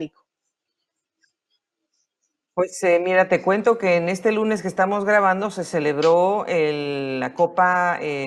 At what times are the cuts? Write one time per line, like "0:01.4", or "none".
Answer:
none